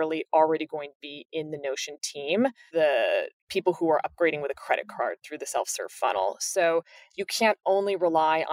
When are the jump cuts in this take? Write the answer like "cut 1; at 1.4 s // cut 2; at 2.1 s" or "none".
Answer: cut 1; at 2.7 s